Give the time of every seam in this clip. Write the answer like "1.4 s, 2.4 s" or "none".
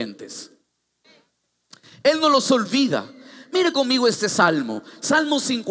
none